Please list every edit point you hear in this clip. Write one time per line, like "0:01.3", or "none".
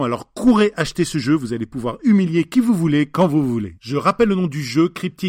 none